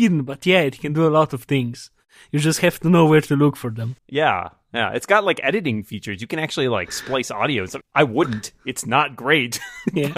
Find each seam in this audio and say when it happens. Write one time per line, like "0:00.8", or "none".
0:04.0
0:07.8